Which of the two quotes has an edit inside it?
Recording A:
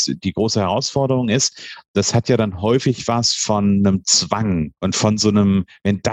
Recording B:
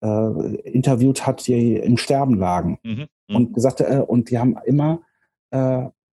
A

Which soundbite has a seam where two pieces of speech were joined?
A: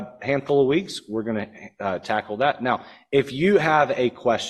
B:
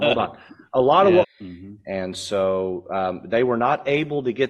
B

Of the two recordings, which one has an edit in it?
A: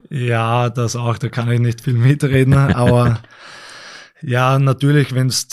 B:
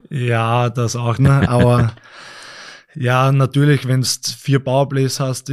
B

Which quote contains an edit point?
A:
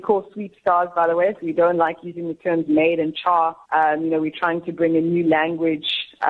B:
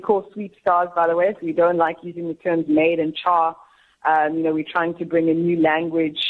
A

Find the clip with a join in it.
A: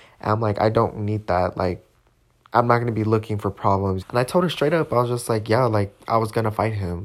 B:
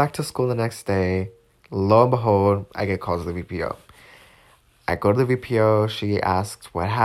A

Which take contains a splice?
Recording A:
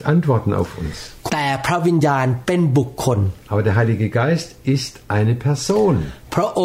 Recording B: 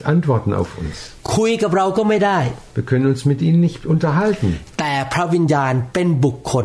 A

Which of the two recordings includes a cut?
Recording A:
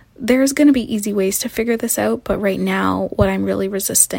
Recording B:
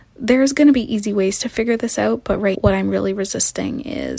B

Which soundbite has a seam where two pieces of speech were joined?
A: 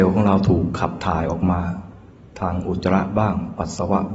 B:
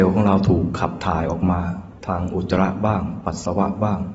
B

